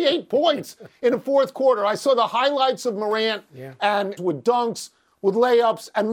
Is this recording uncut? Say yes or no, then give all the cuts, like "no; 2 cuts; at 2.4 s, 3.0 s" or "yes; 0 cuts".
no; 1 cut; at 4.2 s